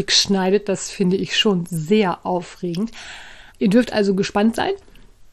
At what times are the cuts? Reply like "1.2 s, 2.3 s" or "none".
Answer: 3.5 s

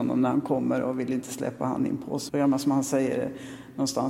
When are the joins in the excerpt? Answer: 2.3 s

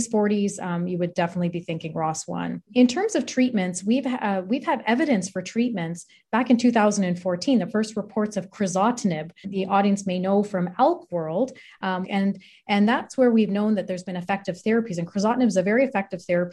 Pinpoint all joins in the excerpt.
9.4 s, 12.0 s

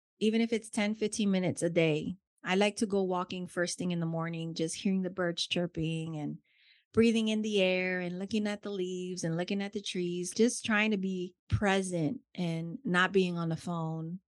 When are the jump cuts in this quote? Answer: 10.3 s, 11.4 s

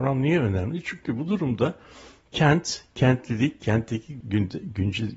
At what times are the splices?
4.2 s

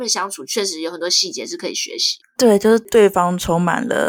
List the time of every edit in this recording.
2.9 s

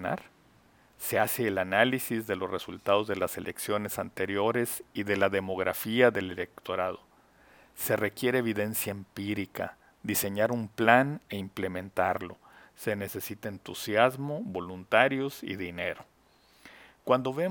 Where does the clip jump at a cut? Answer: none

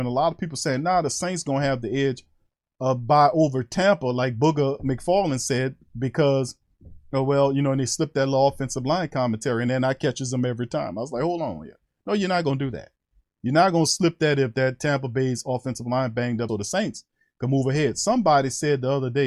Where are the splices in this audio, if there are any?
16.5 s

